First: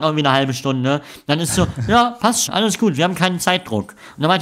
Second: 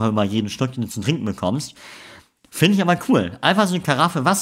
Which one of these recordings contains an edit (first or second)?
first